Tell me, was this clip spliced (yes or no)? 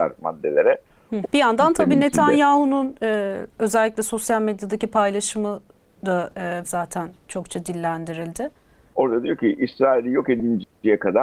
yes